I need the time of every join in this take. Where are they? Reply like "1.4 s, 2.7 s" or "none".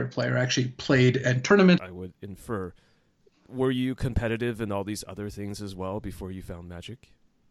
1.8 s